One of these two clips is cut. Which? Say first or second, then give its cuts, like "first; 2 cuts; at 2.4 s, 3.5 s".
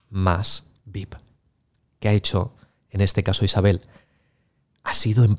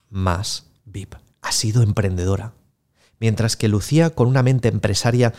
second; 1 cut; at 1.3 s